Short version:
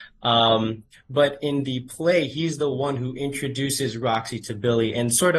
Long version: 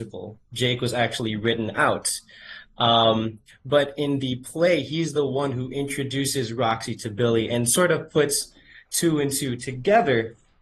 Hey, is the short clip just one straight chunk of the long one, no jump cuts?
yes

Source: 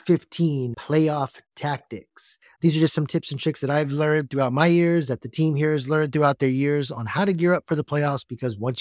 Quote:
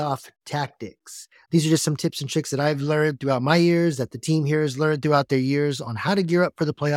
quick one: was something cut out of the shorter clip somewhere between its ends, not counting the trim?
no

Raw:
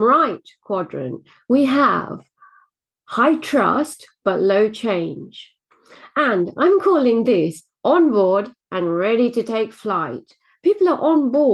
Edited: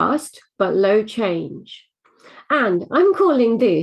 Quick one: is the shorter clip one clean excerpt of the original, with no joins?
yes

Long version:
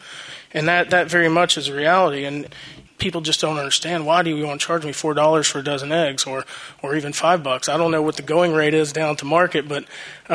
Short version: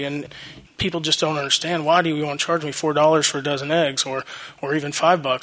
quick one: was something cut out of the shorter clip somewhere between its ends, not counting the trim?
no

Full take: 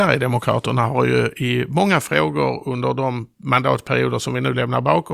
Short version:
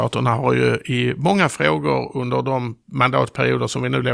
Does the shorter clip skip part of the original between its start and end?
no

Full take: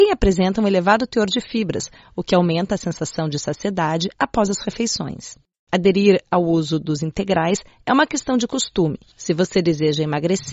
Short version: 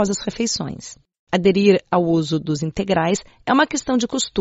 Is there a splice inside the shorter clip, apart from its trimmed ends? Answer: no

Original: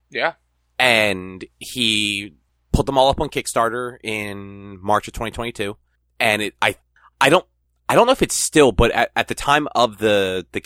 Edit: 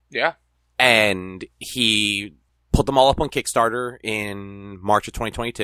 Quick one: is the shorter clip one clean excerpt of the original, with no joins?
yes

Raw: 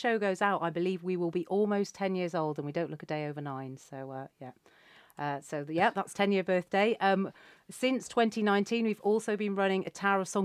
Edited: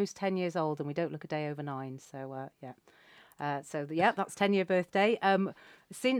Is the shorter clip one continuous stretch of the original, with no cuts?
yes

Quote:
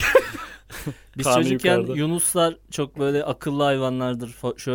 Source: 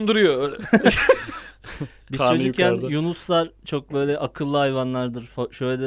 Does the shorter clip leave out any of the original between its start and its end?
no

